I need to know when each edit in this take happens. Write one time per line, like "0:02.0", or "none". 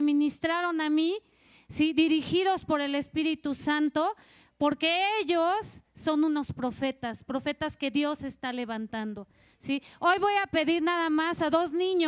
none